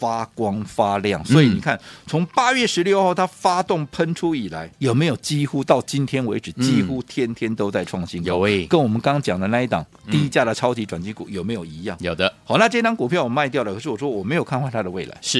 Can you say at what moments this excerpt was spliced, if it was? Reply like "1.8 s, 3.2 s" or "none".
4.7 s